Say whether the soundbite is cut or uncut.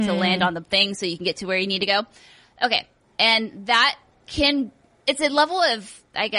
cut